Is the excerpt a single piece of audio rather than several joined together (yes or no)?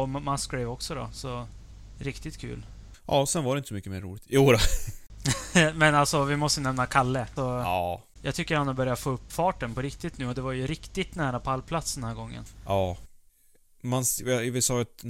no